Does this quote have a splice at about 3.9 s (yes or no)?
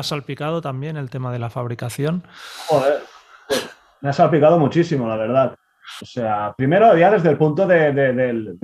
no